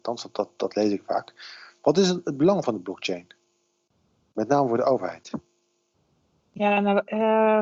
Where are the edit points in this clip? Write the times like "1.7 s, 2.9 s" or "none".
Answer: none